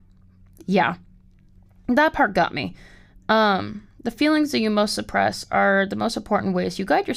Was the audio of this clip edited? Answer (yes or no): no